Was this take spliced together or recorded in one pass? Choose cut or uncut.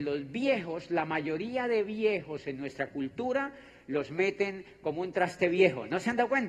uncut